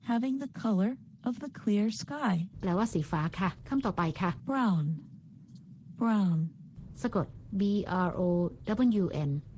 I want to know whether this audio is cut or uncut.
cut